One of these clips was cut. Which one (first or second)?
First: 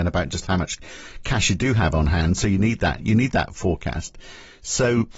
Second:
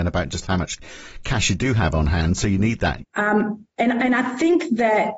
second